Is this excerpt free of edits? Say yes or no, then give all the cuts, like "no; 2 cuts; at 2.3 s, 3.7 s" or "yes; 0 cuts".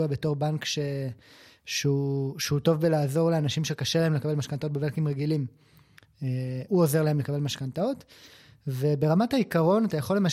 no; 1 cut; at 6.7 s